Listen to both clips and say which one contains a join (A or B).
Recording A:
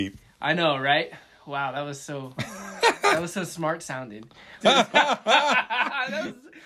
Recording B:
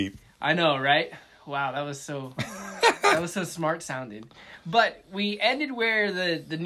A